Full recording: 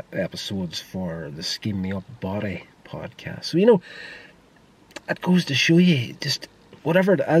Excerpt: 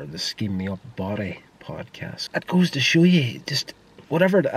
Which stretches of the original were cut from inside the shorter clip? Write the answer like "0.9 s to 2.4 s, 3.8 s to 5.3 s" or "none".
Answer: 3.5 s to 5.0 s